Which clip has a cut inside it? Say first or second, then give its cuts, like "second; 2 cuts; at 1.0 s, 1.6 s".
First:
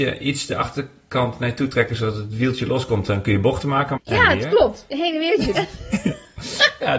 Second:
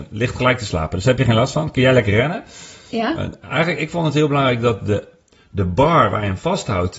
first; 2 cuts; at 4.0 s, 5.5 s